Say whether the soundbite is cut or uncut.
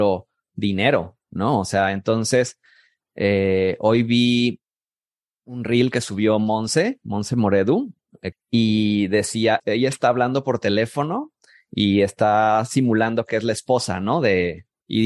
cut